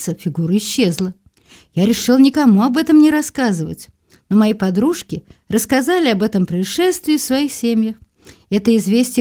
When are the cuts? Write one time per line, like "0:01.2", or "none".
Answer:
none